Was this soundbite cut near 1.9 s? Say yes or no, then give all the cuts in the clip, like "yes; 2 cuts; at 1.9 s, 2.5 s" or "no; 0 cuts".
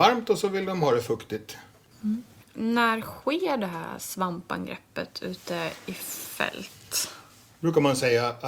yes; 1 cut; at 1.9 s